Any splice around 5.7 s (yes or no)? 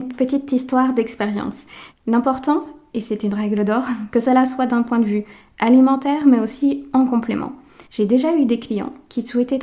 no